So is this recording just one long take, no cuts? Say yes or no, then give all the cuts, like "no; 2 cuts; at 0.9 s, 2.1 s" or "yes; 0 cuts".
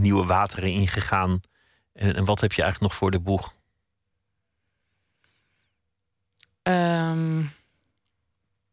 yes; 0 cuts